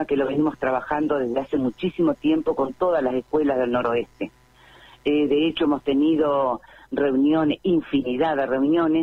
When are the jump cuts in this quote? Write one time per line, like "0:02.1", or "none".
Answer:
none